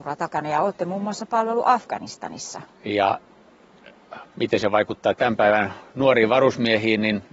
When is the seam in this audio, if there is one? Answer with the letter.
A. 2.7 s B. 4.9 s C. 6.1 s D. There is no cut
A